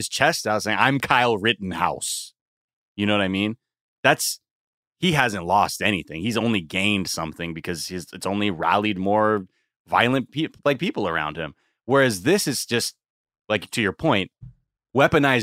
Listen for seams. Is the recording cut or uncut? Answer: uncut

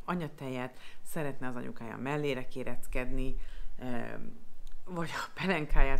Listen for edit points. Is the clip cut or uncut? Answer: uncut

